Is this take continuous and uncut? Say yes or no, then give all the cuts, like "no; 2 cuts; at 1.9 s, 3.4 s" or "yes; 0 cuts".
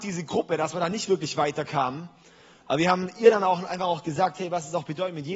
yes; 0 cuts